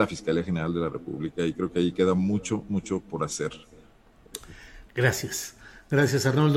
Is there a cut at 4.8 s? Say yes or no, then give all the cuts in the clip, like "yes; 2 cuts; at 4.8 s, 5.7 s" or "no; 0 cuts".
yes; 1 cut; at 4.8 s